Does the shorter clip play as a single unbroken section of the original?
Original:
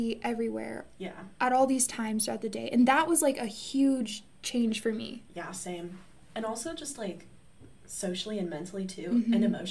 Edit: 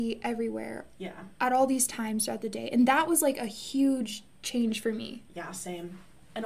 yes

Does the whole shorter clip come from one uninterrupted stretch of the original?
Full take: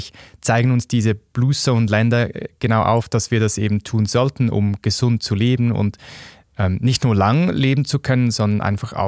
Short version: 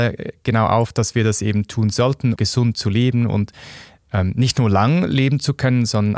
no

